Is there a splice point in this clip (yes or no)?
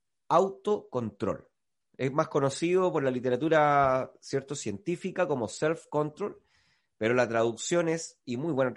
no